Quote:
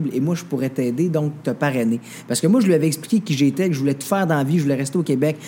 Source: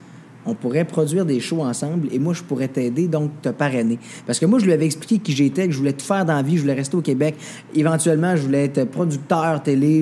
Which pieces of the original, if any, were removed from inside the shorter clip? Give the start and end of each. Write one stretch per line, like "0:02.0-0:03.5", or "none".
none